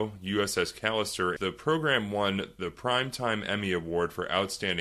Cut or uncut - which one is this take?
cut